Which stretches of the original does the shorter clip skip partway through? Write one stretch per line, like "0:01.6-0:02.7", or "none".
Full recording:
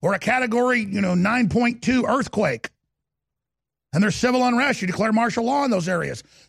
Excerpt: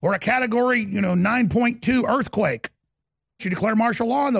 0:03.4-0:04.8